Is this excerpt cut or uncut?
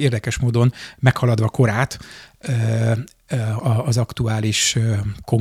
cut